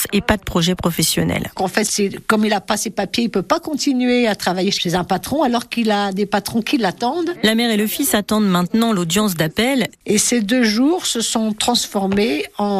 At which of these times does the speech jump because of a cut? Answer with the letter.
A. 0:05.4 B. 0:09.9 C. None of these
B